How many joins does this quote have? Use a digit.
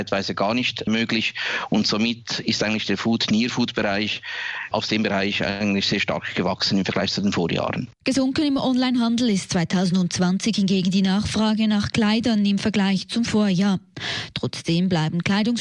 0